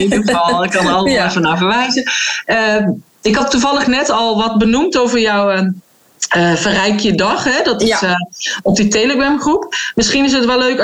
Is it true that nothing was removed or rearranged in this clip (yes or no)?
yes